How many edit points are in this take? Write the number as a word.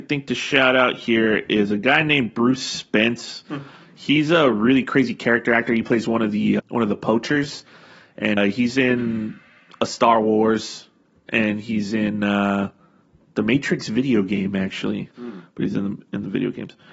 three